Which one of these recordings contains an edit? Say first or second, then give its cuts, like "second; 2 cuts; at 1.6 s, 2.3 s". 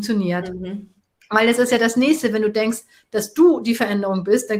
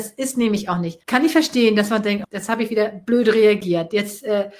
second; 2 cuts; at 1.0 s, 2.2 s